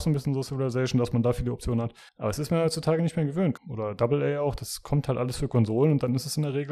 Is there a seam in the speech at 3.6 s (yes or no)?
yes